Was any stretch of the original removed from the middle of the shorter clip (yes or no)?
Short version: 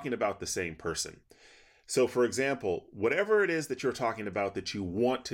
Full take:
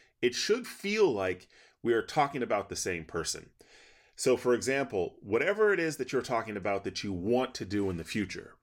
no